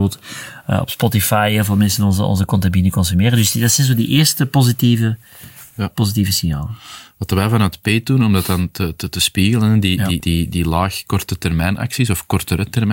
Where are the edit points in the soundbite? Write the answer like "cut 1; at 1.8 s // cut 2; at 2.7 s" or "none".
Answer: cut 1; at 10.2 s